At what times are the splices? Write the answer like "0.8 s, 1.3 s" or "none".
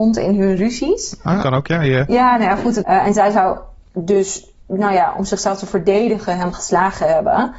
1.4 s, 2.8 s